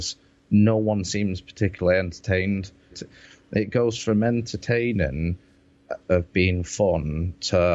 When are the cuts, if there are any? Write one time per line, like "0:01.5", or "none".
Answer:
0:02.9
0:06.0

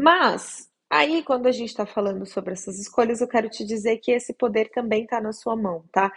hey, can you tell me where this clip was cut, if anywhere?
none

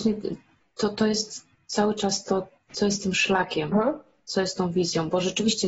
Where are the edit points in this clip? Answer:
0:03.7

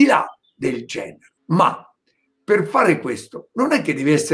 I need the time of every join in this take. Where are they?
0:01.4

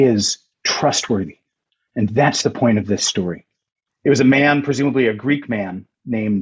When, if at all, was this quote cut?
0:03.9

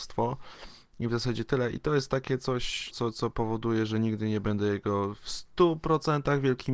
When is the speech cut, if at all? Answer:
0:02.9

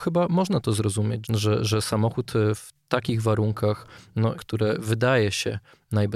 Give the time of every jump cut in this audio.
0:01.2
0:04.4

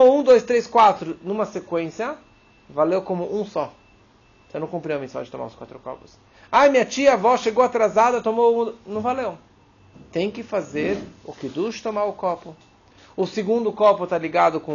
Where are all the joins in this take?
none

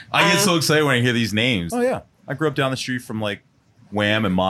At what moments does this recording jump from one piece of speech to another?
0:01.7

